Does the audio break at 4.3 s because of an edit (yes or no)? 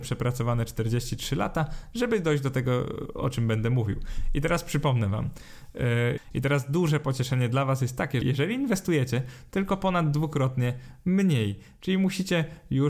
no